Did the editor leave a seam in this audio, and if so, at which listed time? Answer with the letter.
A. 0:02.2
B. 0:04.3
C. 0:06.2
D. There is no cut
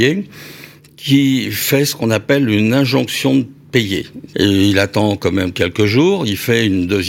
B